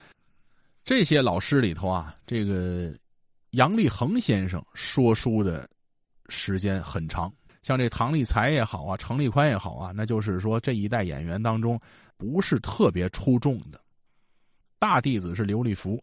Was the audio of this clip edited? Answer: yes; 2 cuts; at 7.5 s, 14.6 s

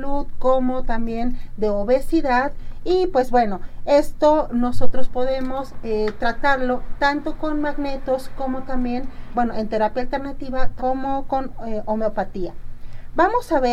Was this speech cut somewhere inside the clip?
yes; 2 cuts; at 9.3 s, 10.8 s

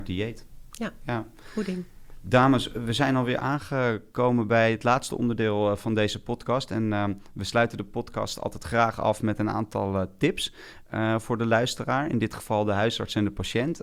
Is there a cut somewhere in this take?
no; 0 cuts

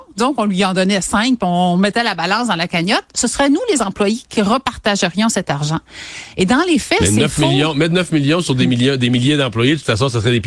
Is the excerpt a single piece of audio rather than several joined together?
yes; 0 cuts

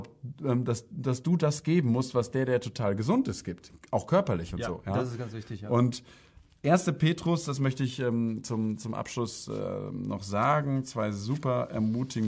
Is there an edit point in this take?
no; 0 cuts

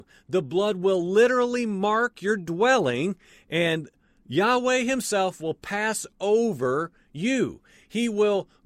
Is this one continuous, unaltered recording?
yes; 0 cuts

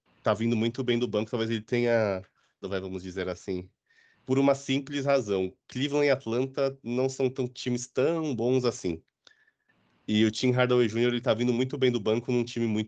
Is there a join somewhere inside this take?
yes; 2 cuts; at 2.6 s, 4.1 s

